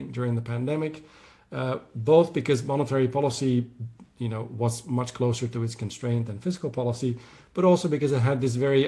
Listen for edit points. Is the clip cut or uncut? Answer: uncut